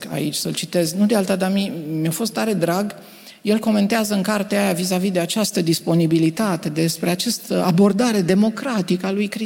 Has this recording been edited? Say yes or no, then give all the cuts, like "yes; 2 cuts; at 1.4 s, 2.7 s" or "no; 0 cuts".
no; 0 cuts